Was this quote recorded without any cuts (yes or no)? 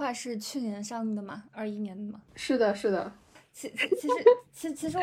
yes